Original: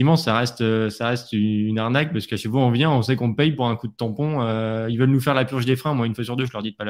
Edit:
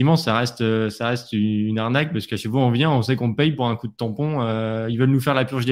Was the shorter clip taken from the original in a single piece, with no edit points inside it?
yes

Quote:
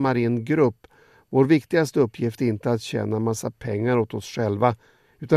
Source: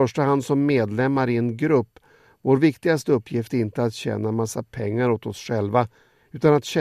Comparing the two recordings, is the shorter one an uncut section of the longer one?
yes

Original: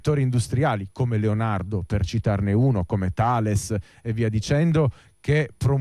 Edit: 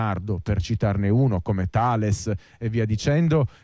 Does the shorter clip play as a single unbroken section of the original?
yes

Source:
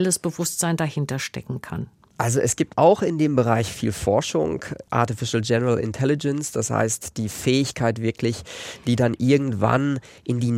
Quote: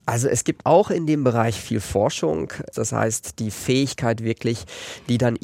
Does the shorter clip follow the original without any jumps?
no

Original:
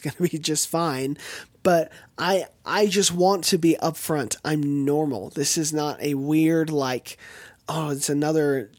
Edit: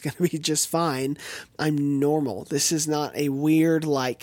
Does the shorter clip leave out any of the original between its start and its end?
yes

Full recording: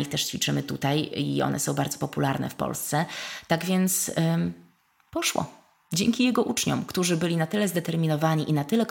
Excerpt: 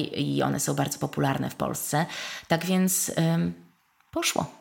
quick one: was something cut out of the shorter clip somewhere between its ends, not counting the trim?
no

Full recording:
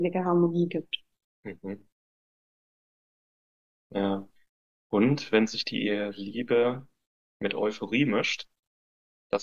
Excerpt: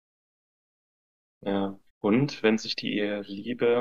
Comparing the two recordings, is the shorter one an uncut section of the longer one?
no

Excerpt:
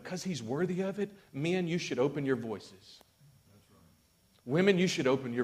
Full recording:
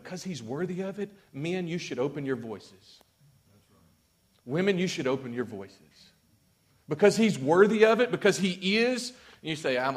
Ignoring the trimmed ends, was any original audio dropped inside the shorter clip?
no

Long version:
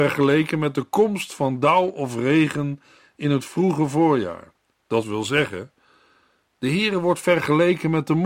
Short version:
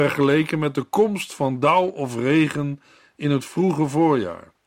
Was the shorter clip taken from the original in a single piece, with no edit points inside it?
yes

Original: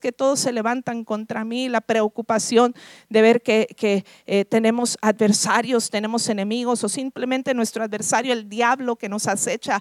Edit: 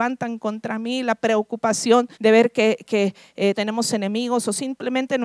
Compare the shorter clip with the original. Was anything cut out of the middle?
yes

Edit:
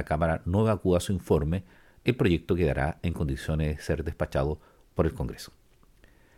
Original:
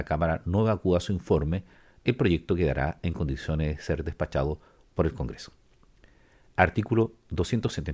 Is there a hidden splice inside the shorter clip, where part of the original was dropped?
no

